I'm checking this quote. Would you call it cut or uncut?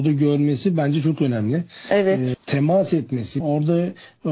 cut